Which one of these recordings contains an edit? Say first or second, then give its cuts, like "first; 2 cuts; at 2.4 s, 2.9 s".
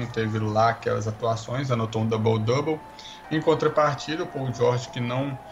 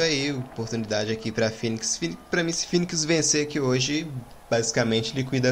first; 1 cut; at 3.2 s